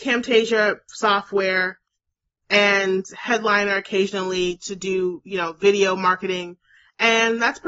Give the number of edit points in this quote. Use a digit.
0